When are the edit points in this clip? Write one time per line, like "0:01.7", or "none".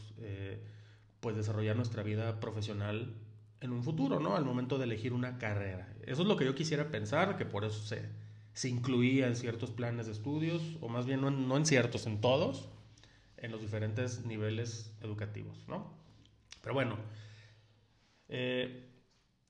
none